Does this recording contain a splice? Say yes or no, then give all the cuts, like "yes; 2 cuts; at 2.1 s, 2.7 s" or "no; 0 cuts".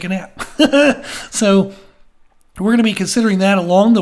no; 0 cuts